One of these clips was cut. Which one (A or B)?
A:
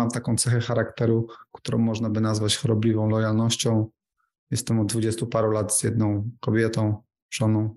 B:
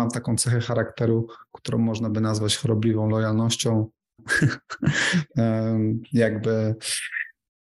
B